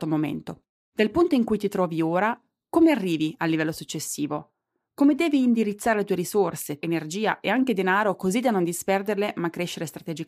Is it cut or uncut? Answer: cut